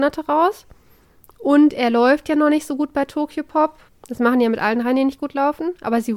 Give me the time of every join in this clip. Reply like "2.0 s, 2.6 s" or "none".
3.9 s